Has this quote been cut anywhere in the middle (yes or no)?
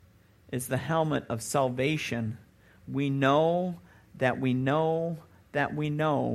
no